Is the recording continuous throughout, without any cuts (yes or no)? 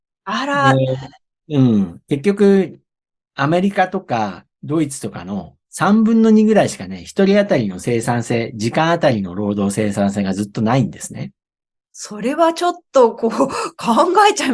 yes